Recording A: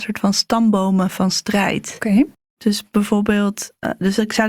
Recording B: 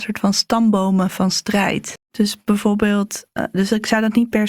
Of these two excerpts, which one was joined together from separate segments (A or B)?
B